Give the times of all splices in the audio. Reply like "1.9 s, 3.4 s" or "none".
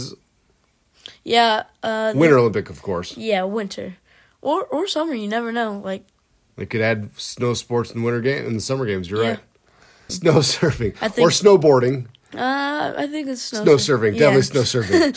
10.1 s